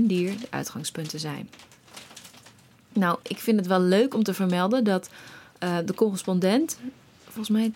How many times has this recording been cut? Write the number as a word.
zero